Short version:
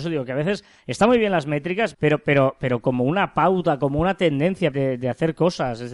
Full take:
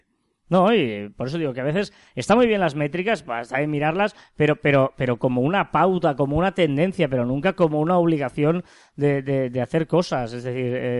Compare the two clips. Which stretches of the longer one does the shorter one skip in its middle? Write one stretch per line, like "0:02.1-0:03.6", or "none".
0:03.2-0:04.3
0:07.1-0:09.2